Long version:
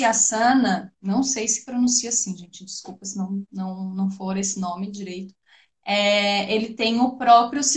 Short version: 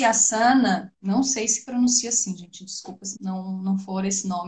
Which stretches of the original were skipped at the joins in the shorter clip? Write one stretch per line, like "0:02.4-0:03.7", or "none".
0:03.1-0:03.5